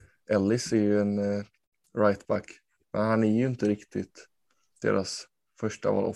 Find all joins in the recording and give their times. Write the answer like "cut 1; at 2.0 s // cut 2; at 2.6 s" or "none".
cut 1; at 2.8 s

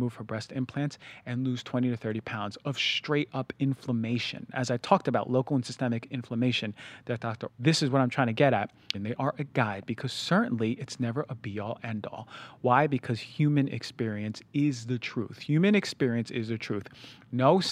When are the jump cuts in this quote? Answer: cut 1; at 7.5 s // cut 2; at 8.9 s

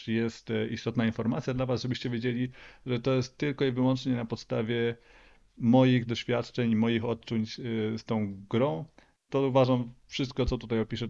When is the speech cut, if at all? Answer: none

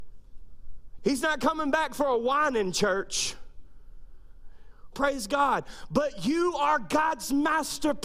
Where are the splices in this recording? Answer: cut 1; at 1.0 s // cut 2; at 4.9 s

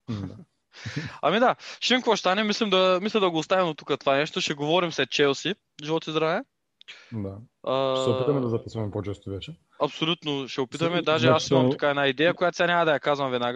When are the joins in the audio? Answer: none

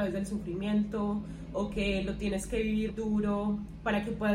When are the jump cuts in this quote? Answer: cut 1; at 2.9 s

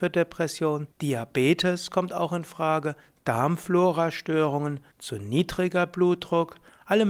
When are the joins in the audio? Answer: cut 1; at 0.9 s // cut 2; at 4.9 s

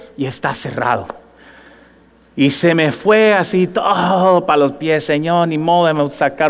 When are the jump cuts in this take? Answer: none

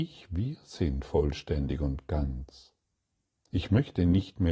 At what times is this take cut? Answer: none

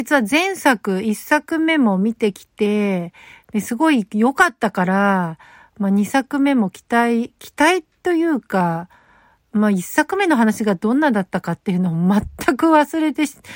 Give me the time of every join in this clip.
none

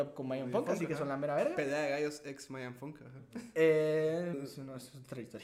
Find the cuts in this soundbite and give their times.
cut 1; at 4.3 s

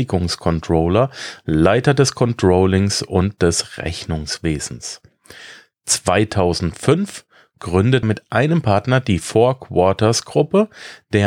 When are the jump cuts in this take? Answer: cut 1; at 8.0 s

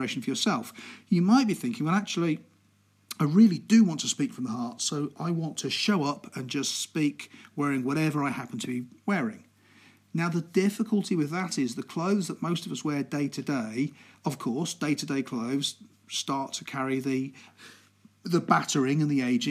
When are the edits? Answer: none

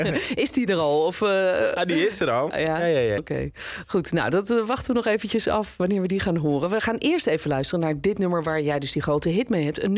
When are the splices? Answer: cut 1; at 3.2 s

